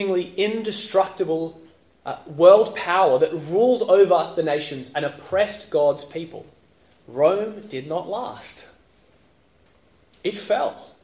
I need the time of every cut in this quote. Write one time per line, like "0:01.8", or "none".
none